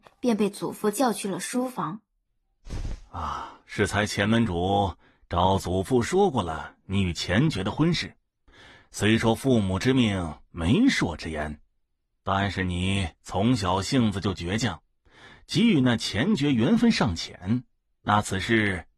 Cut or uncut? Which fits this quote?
uncut